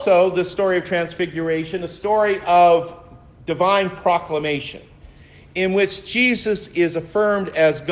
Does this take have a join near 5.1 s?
no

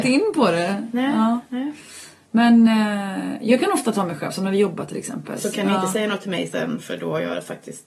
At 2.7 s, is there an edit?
no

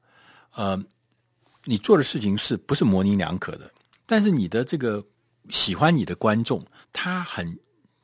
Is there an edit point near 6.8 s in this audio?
yes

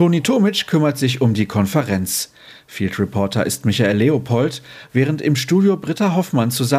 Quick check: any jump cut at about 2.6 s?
no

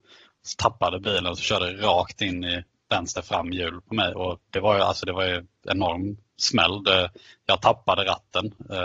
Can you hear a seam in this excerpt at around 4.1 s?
no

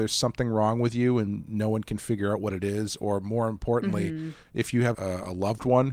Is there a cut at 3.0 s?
no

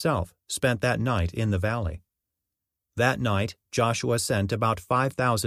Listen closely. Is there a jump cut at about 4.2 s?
no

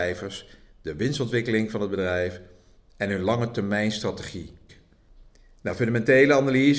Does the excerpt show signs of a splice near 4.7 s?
yes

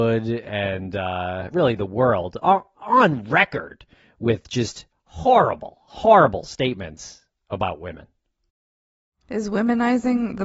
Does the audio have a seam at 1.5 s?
yes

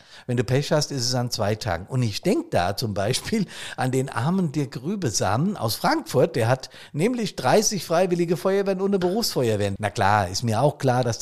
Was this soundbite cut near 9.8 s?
yes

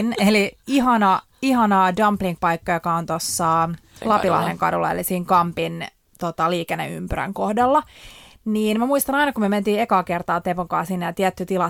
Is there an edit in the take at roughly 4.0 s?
yes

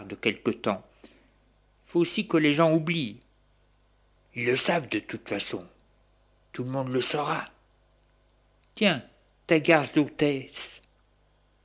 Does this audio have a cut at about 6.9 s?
no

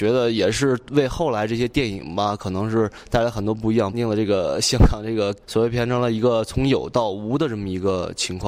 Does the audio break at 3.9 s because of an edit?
yes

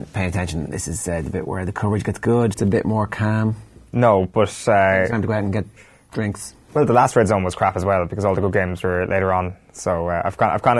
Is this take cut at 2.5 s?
yes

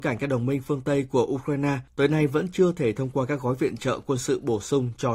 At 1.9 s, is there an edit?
yes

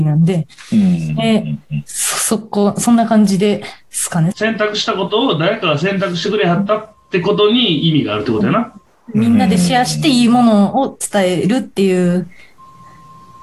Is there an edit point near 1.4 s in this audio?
no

